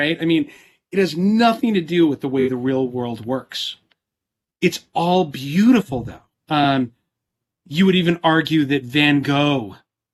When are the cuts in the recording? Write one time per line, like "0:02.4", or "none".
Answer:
0:06.3